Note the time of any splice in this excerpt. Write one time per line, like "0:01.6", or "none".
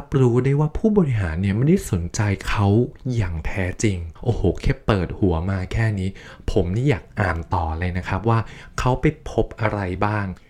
0:04.2